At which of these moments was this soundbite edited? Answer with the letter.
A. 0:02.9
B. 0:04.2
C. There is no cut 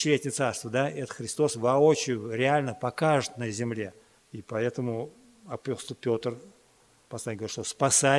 B